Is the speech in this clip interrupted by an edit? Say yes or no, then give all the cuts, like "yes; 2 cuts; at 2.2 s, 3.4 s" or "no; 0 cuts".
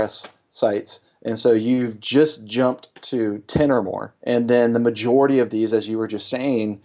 yes; 1 cut; at 4.2 s